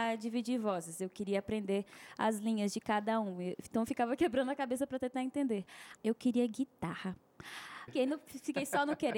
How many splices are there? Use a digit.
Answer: 2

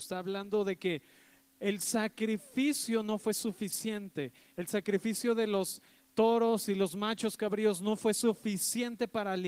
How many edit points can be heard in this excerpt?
0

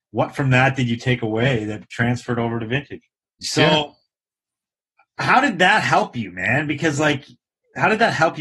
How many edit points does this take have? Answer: 1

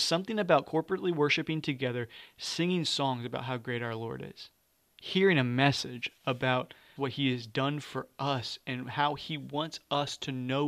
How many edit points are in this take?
1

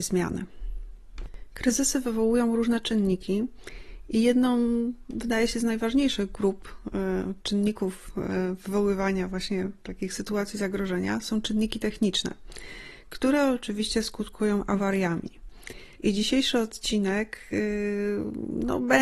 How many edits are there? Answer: 1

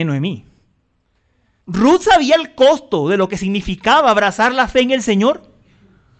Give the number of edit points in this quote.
1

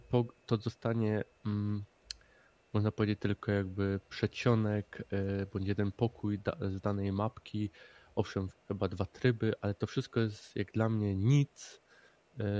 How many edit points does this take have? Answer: 1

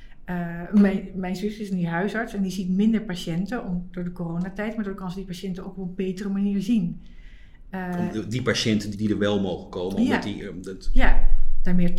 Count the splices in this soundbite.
1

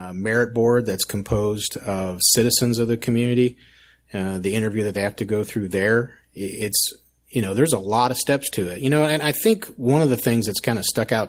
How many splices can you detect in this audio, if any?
0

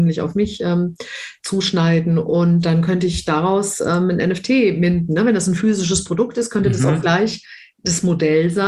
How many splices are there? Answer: 0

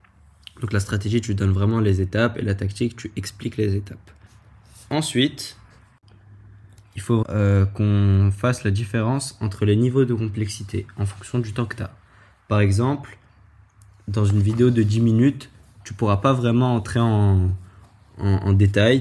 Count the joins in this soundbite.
1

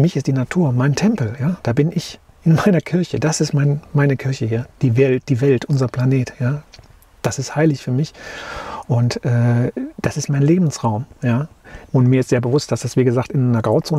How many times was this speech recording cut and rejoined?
1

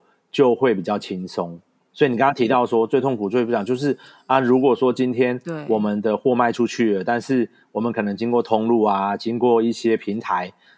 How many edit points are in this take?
0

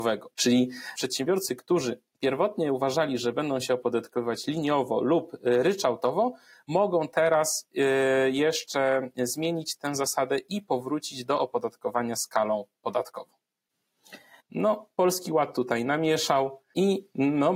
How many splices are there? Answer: 1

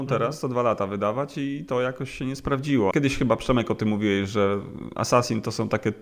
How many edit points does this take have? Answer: 1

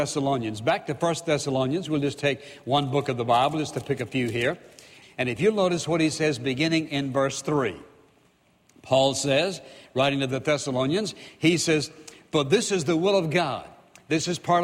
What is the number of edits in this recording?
1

